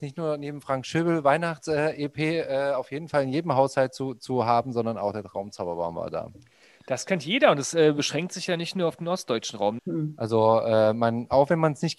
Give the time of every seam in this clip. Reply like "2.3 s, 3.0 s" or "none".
9.8 s